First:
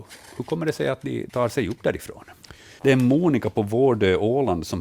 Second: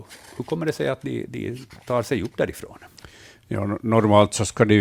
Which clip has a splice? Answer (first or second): first